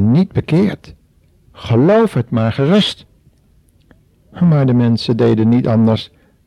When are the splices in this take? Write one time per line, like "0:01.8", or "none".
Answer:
0:01.5
0:04.3